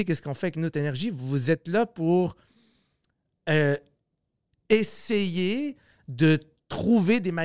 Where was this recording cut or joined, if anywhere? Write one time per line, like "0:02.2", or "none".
none